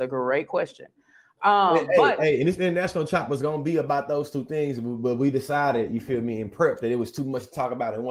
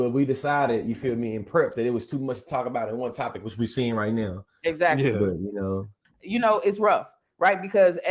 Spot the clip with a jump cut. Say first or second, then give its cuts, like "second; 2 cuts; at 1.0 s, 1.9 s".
second; 1 cut; at 6.0 s